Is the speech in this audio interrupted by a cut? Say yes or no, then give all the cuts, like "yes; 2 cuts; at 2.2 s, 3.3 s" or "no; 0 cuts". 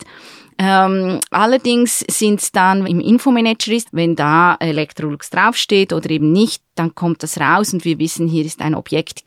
yes; 2 cuts; at 2.8 s, 3.9 s